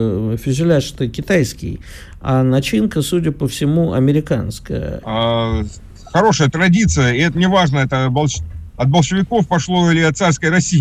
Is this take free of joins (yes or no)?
no